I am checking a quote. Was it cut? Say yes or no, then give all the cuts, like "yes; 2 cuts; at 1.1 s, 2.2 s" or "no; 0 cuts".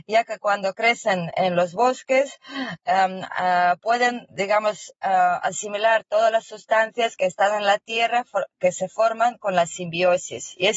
no; 0 cuts